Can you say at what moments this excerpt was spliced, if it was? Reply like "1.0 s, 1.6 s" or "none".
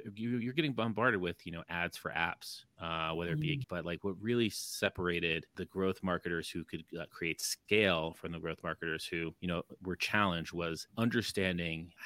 3.6 s